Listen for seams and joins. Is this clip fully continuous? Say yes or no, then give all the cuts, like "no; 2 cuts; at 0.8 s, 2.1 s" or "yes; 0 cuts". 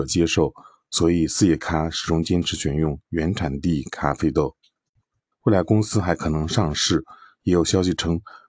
no; 1 cut; at 5.3 s